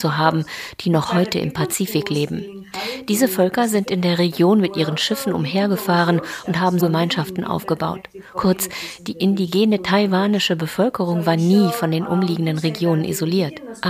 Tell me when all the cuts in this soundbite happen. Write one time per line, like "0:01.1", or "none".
0:06.8